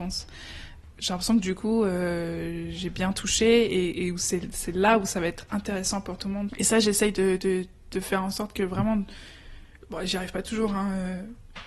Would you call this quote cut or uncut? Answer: cut